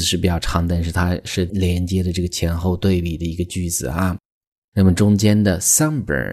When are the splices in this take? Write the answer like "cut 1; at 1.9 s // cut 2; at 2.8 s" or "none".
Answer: cut 1; at 1.5 s